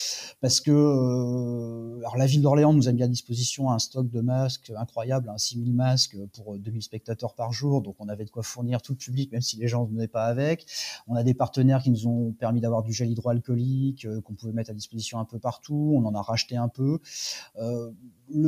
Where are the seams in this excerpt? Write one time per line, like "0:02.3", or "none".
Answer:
none